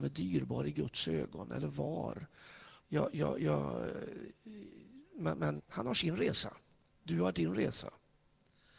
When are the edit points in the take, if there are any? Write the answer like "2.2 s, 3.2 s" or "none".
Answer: 2.8 s, 5.6 s